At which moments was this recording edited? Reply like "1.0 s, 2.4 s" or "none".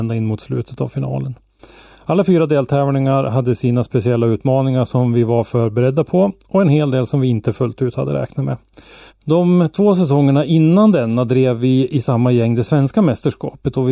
9.1 s